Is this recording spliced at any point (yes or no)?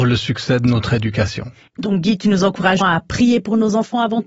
yes